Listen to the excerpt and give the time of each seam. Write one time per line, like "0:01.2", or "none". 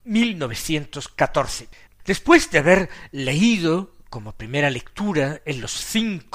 0:01.9